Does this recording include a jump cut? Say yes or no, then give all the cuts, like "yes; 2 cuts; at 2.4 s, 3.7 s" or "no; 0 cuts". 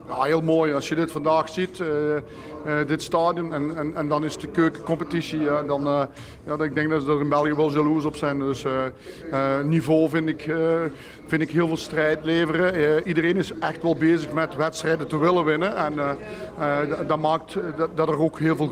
no; 0 cuts